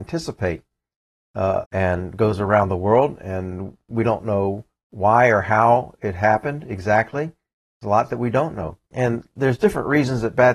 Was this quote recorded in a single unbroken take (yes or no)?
no